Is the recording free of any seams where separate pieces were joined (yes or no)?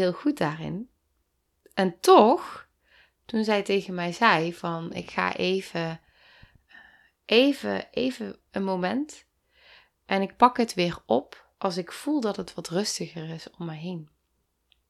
no